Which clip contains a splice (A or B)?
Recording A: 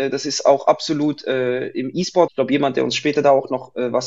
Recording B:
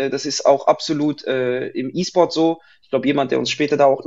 A